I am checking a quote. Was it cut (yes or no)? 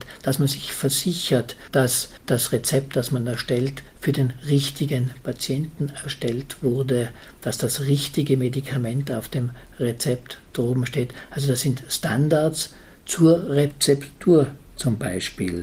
no